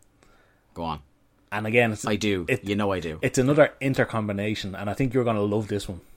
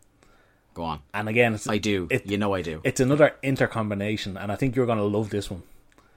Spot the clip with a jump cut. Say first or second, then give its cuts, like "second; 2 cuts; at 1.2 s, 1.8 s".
second; 1 cut; at 1.1 s